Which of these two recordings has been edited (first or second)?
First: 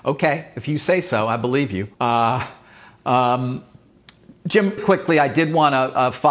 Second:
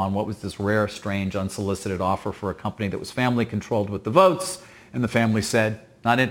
first